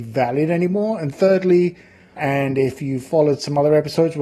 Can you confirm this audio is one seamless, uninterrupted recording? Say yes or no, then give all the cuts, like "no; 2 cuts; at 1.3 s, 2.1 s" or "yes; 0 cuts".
no; 1 cut; at 2.2 s